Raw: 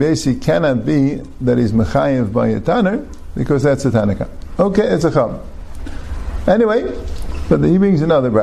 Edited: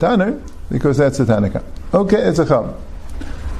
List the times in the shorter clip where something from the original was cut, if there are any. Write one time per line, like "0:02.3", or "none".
none